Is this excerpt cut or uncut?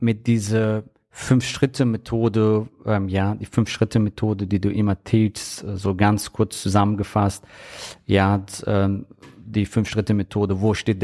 uncut